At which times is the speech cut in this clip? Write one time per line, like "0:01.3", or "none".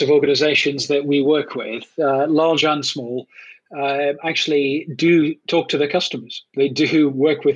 none